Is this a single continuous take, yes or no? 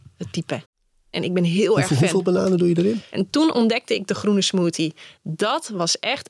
no